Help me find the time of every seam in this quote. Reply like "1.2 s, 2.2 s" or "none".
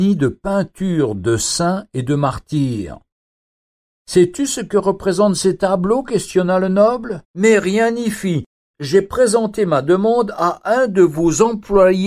7.2 s, 8.7 s